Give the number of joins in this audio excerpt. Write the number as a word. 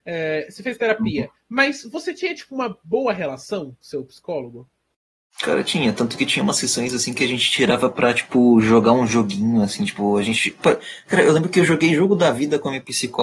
zero